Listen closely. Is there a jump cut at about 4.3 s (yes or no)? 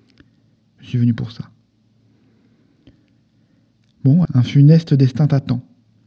yes